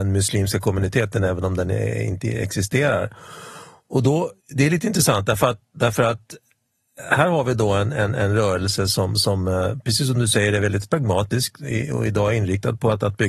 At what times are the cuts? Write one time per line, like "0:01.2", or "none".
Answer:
0:04.4